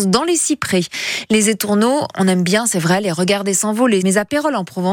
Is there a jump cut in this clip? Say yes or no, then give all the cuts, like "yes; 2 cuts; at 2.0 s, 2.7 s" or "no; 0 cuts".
yes; 1 cut; at 4.0 s